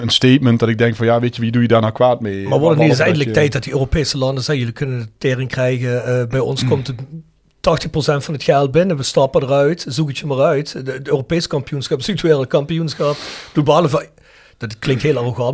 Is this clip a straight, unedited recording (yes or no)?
yes